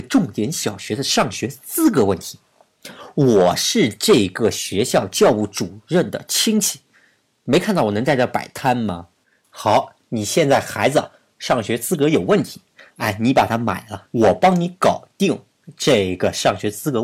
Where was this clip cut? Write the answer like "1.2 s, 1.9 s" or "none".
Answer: 9.2 s, 12.9 s, 14.1 s